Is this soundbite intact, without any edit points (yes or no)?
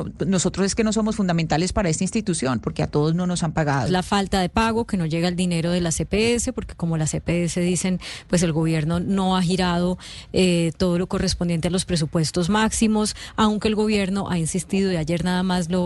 no